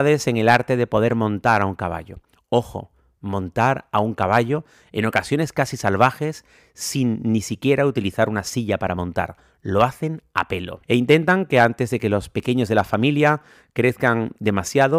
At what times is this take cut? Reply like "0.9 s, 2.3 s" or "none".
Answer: 10.8 s